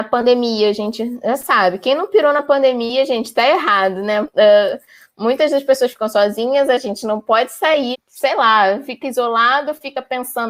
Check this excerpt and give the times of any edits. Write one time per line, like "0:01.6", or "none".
0:04.2
0:07.9